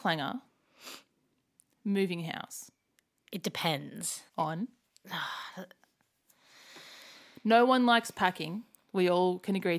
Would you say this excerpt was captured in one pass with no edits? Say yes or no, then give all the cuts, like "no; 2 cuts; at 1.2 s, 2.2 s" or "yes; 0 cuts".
no; 1 cut; at 4.3 s